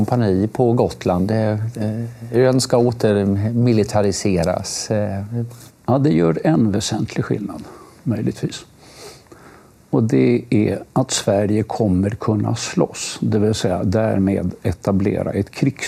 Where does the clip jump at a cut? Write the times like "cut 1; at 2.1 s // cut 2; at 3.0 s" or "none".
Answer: cut 1; at 5.7 s